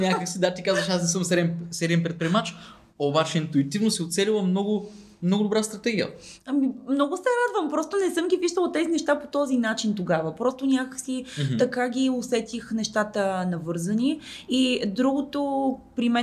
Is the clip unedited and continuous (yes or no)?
yes